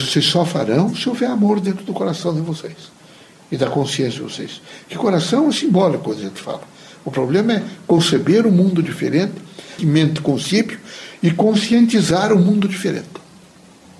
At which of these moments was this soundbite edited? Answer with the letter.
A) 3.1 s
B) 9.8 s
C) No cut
B